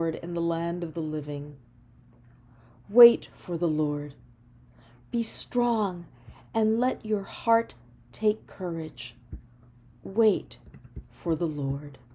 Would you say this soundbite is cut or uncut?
uncut